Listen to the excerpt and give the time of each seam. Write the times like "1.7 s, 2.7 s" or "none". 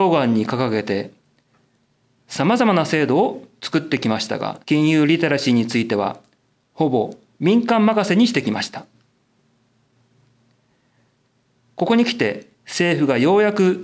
4.6 s, 12.5 s